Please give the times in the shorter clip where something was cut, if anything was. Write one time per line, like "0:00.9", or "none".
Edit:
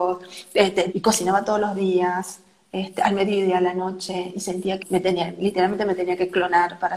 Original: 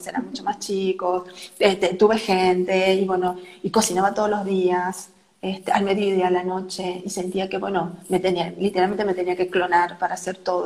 0:00.9
0:04.8